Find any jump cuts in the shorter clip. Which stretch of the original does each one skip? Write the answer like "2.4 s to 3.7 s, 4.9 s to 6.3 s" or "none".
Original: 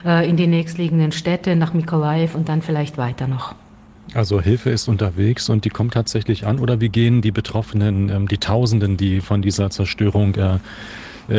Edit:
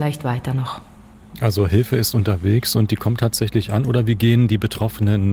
none